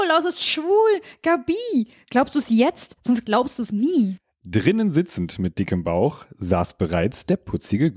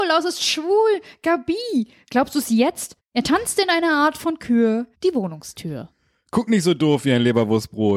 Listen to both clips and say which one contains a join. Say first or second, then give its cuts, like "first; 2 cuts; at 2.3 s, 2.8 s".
second; 2 cuts; at 3.0 s, 4.9 s